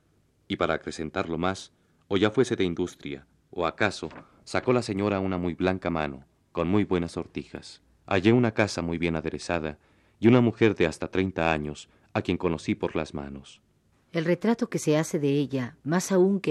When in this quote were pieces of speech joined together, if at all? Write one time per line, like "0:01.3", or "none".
0:08.0
0:13.9